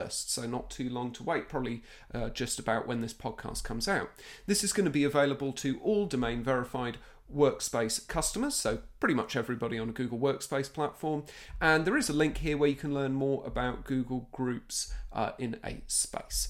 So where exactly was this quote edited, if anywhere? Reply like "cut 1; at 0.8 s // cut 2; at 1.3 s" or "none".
none